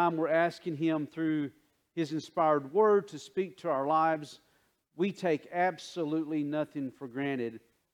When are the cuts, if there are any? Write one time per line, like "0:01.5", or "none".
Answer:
none